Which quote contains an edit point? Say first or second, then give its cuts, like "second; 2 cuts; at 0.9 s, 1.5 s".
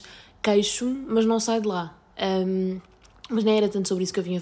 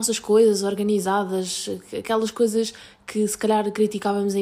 first; 1 cut; at 2.1 s